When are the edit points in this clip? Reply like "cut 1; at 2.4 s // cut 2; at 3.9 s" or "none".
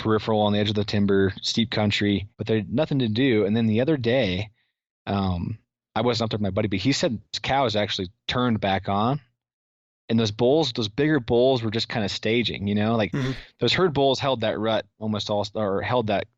cut 1; at 2.3 s